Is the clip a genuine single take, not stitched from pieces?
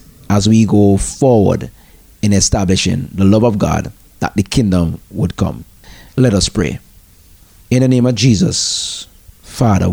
yes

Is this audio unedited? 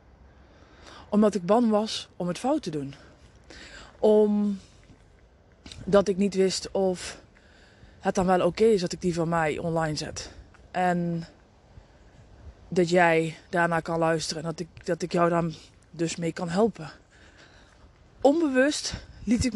yes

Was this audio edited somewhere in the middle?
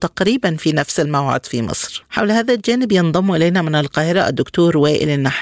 yes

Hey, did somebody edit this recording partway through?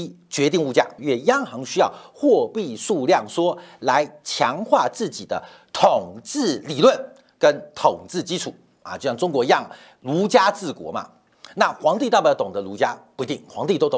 yes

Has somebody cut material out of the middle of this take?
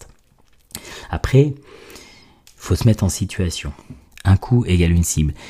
yes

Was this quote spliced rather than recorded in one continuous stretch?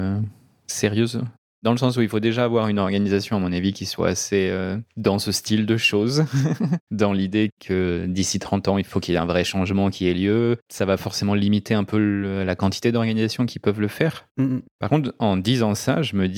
no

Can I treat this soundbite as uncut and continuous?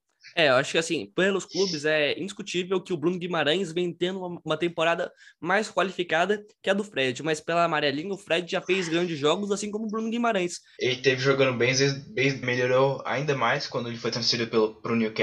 no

